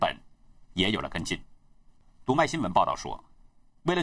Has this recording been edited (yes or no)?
no